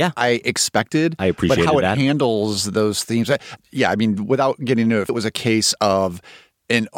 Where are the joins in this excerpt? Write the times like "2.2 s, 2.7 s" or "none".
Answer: 3.6 s, 5.1 s